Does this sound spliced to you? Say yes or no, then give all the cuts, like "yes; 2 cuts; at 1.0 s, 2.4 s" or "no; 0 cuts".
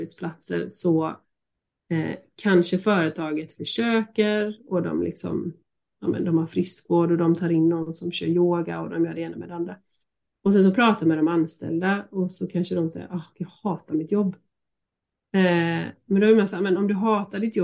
no; 0 cuts